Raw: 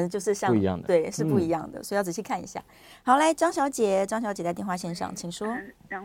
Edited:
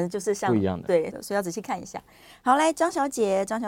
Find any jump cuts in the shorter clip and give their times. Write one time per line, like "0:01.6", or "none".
0:01.1

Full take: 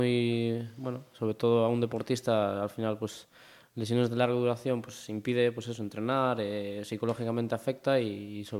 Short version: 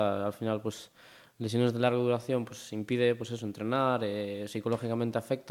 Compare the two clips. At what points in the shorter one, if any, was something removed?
none

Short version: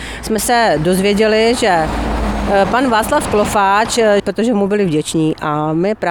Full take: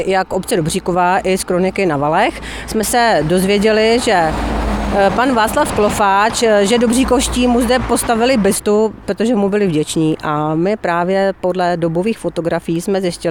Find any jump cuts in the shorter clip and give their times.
0:04.2

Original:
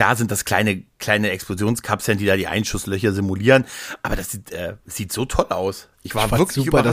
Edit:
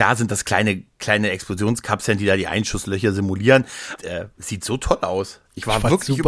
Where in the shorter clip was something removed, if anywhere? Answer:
0:04.0

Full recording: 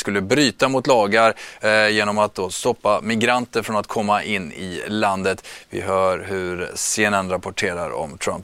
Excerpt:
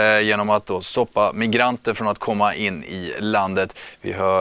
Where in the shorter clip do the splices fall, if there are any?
none

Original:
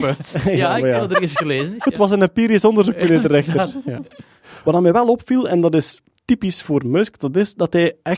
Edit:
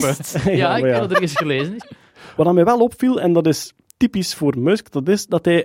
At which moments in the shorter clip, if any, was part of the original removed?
0:01.8

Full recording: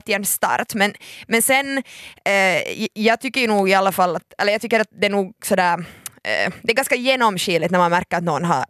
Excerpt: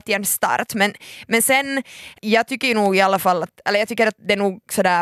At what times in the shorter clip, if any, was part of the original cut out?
0:02.2

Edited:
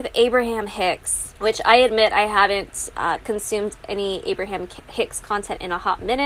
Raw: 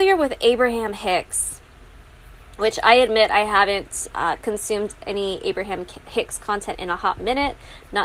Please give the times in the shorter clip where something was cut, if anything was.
0:01.4

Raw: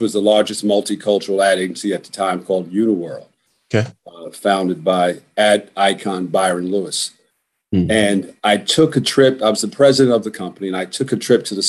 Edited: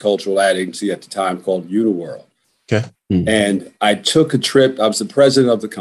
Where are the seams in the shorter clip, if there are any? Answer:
0:02.9

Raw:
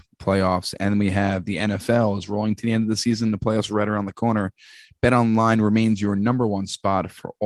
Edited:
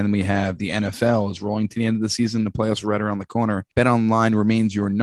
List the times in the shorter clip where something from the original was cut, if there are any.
0:03.7

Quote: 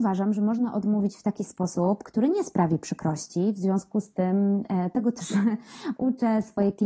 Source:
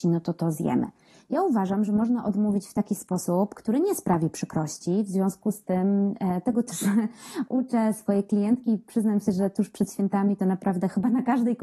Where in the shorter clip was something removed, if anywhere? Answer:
none

